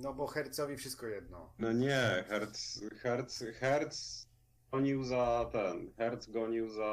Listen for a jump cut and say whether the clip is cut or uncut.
uncut